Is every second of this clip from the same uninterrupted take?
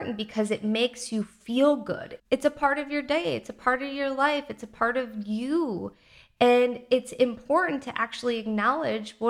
no; 1 cut; at 2.2 s

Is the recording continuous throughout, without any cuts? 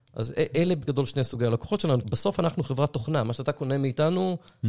no; 1 cut; at 2.0 s

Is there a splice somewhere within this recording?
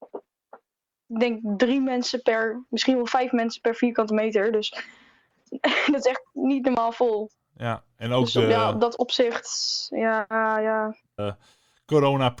yes; 1 cut; at 11.2 s

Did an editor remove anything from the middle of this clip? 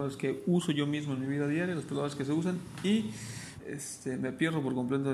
yes; 1 cut; at 3.6 s

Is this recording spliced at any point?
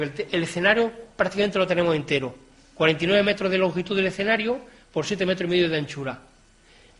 no; 0 cuts

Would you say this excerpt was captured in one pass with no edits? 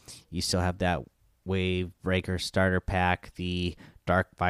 yes; 0 cuts

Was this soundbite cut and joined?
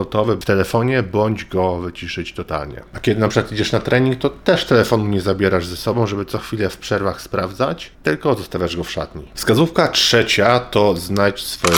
yes; 1 cut; at 7.9 s

